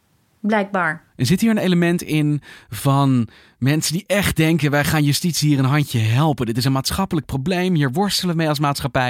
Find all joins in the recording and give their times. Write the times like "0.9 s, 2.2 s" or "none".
none